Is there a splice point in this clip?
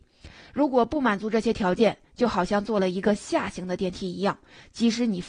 no; 0 cuts

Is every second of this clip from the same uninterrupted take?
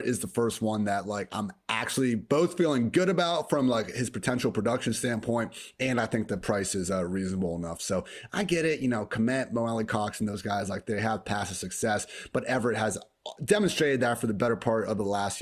yes; 0 cuts

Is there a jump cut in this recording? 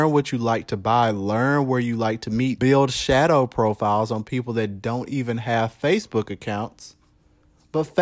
yes; 1 cut; at 2.6 s

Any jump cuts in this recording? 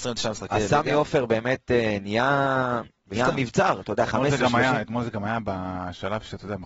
no; 0 cuts

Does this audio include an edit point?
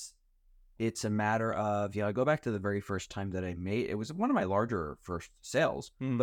no; 0 cuts

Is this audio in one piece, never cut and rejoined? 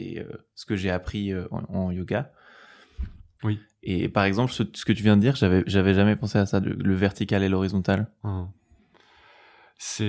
no; 1 cut; at 3.4 s

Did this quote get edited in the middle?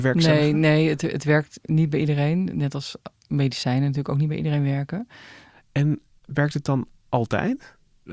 yes; 1 cut; at 5.5 s

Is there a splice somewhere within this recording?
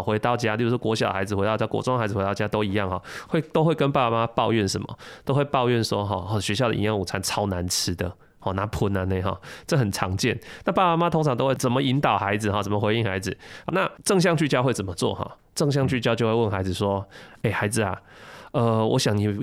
yes; 1 cut; at 13.6 s

